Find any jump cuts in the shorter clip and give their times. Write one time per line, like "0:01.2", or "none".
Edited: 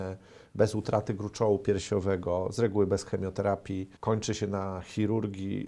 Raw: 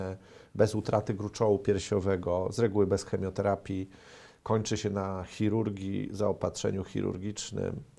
0:04.0

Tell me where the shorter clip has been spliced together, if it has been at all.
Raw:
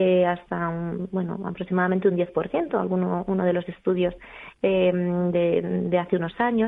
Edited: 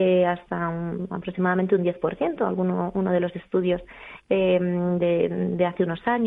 0:01.1

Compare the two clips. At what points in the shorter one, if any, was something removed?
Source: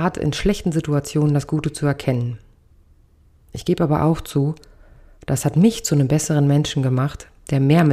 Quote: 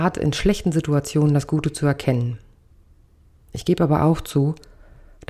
none

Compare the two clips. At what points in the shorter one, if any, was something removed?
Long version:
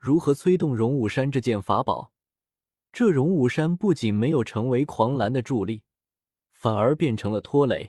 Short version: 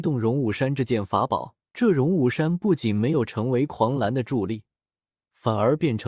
0:01.7

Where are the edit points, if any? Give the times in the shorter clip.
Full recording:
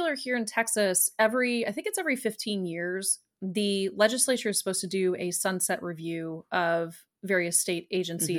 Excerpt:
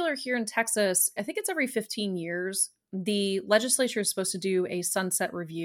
0:01.2

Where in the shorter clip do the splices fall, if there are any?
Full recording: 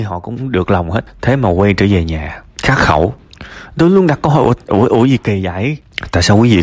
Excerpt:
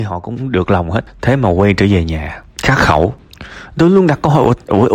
none

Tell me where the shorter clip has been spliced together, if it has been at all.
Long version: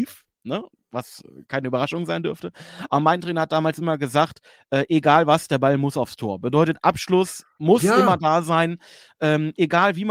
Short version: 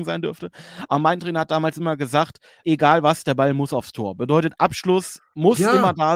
0:02.6

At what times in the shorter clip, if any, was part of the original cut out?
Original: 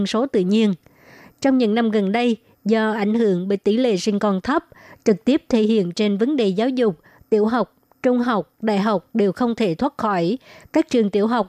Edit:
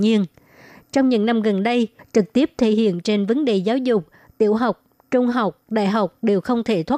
0:02.0

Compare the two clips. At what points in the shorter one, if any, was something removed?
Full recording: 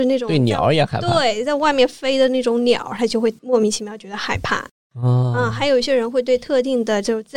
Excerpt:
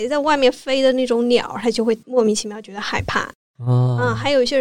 none

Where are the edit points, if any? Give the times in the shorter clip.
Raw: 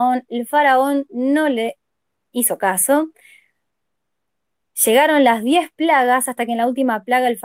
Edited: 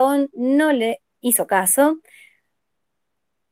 0:01.1

